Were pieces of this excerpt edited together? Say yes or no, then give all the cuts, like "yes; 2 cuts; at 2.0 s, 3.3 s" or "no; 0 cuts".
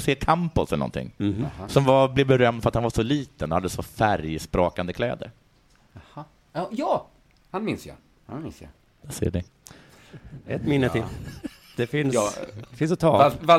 yes; 1 cut; at 8.2 s